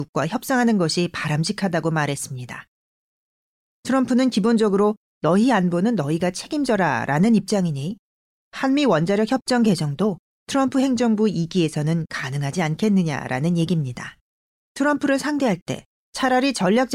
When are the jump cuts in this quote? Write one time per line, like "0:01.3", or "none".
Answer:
0:14.5